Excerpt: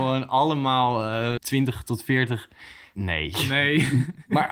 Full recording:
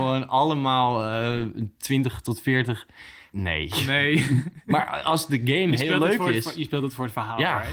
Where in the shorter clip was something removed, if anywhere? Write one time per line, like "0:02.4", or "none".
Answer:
0:01.4